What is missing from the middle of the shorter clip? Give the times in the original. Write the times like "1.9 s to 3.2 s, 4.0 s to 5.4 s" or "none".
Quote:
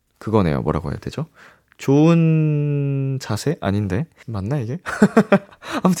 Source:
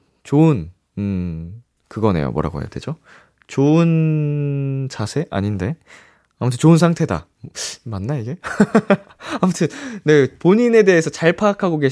5.9 s to 7.8 s